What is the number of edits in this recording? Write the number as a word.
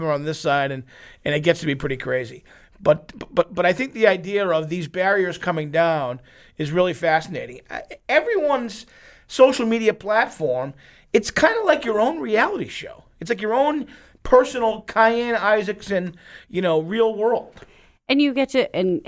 zero